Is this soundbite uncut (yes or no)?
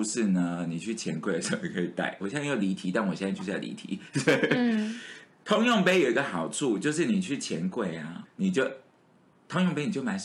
no